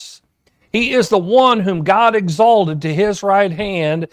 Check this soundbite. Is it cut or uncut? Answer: uncut